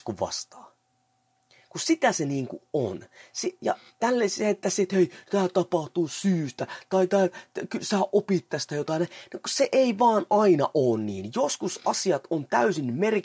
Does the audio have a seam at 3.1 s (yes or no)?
no